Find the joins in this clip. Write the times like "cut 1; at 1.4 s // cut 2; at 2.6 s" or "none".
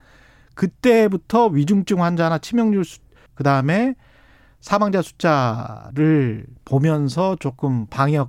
cut 1; at 3.3 s // cut 2; at 6.6 s